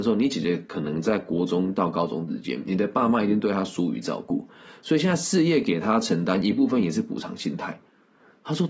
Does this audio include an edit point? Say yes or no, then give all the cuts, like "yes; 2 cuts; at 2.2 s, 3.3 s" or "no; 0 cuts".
no; 0 cuts